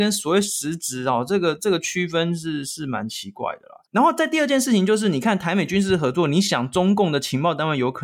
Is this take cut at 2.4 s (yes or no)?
no